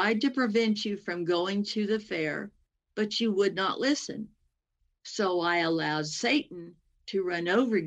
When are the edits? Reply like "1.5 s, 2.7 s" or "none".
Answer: none